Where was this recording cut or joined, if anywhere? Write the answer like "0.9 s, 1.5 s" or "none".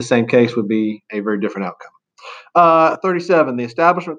none